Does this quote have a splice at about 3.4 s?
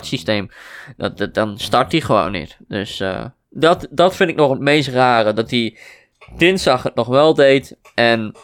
no; 0 cuts

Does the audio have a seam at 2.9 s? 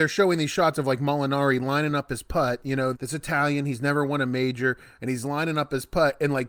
yes; 1 cut; at 2.9 s

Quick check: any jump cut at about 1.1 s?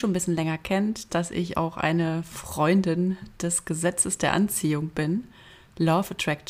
yes; 1 cut; at 1.1 s

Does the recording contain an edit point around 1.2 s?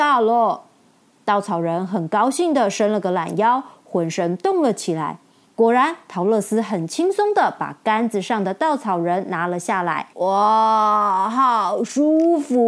no; 2 cuts; at 5.4 s, 10.1 s

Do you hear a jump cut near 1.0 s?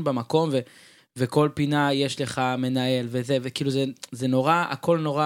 yes; 1 cut; at 1.0 s

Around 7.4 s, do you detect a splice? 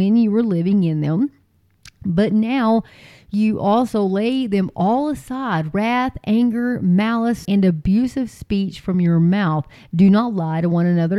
yes; 1 cut; at 7.4 s

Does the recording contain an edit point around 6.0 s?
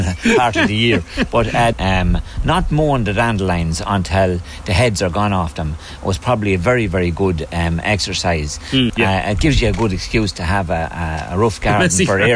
no; 2 cuts; at 1.7 s, 8.9 s

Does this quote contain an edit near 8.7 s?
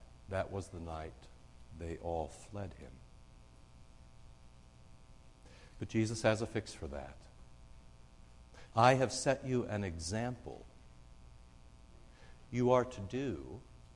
yes; 1 cut; at 8.7 s

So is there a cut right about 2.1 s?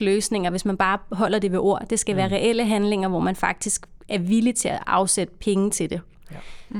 no; 0 cuts

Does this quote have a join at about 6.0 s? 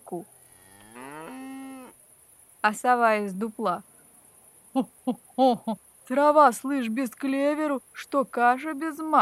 yes; 1 cut; at 6.0 s

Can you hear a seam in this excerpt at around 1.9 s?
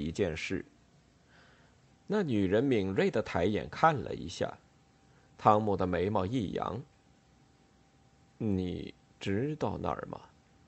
yes; 1 cut; at 1.9 s

